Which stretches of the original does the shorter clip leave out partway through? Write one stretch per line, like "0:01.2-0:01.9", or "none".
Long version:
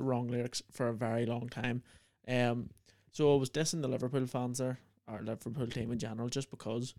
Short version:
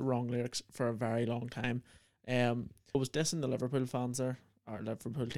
0:02.9-0:03.4